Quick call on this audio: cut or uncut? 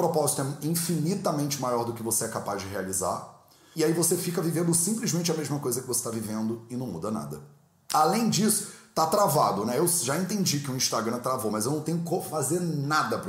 uncut